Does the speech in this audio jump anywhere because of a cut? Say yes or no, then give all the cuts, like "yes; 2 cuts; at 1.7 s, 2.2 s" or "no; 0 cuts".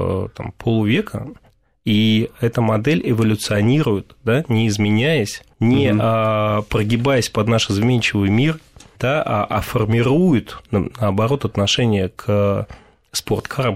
no; 0 cuts